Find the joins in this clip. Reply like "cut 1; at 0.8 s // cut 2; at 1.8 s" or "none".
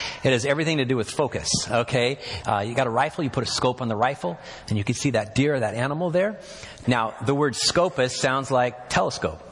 cut 1; at 2.4 s // cut 2; at 6.8 s

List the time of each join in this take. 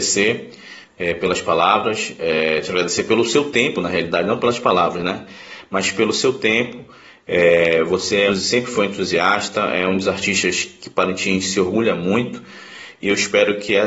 cut 1; at 8.3 s

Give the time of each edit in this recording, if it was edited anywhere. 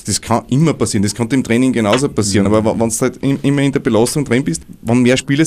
none

